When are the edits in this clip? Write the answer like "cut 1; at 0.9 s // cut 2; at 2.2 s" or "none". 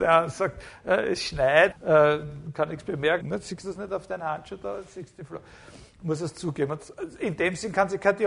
cut 1; at 1.7 s // cut 2; at 3.2 s